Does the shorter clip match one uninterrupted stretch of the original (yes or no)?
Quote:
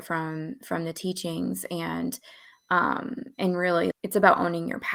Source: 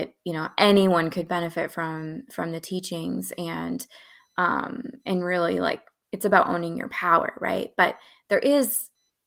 no